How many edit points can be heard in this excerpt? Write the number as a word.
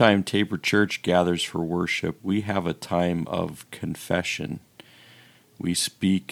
one